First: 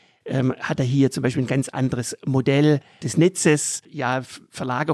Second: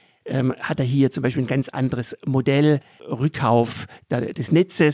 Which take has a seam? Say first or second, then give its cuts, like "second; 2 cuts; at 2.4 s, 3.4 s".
first; 1 cut; at 3.0 s